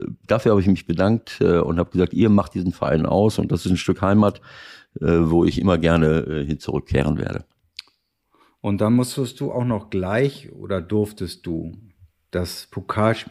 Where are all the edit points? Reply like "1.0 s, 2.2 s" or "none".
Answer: none